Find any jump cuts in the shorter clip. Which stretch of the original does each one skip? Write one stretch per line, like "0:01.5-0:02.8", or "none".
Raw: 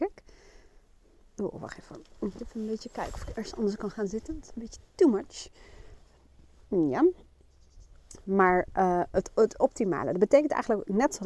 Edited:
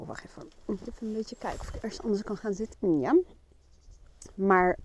0:04.3-0:06.6